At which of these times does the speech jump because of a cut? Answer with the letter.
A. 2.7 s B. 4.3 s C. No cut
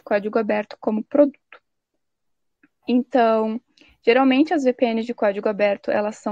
C